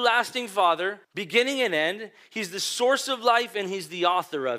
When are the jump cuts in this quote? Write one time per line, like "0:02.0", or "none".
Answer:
0:01.0